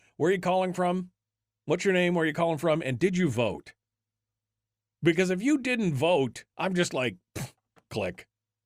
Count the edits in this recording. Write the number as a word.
one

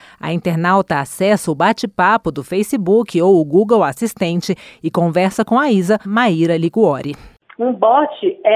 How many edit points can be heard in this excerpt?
one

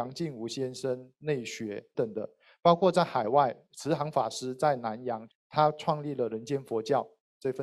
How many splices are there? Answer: two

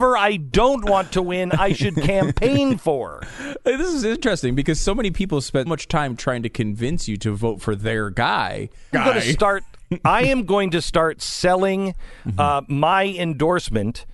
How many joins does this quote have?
two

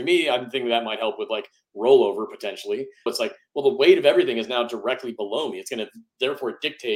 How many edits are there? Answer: one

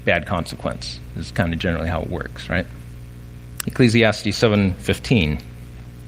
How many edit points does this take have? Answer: one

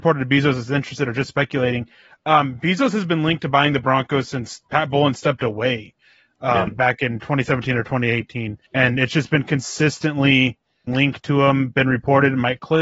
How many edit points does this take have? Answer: two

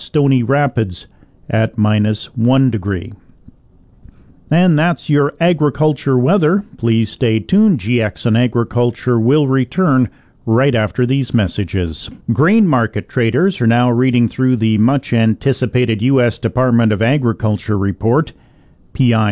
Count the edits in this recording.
one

